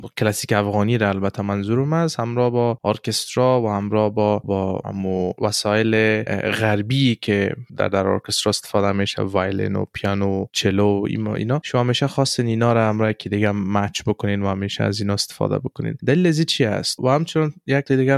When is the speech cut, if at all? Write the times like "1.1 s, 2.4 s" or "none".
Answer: 4.4 s, 17.0 s